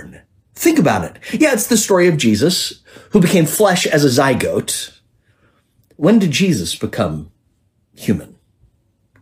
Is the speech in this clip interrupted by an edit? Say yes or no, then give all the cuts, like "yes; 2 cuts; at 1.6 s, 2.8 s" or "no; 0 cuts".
no; 0 cuts